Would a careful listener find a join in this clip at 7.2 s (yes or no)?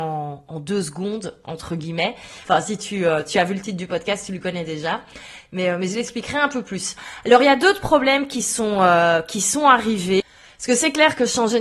no